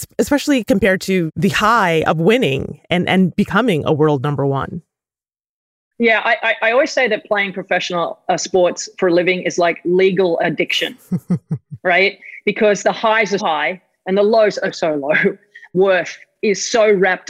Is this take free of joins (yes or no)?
no